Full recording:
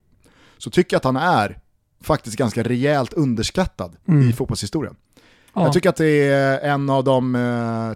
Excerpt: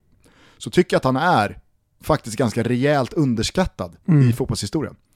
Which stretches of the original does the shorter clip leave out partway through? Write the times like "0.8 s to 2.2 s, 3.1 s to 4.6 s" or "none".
none